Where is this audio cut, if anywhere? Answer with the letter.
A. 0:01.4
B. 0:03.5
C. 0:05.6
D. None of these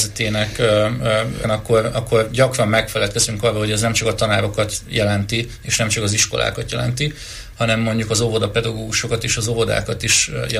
A